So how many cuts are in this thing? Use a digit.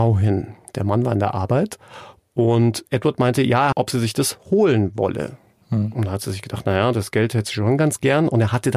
1